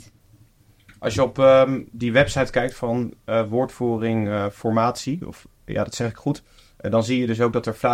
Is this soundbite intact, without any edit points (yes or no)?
yes